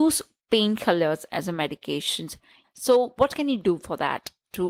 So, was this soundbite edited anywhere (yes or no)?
yes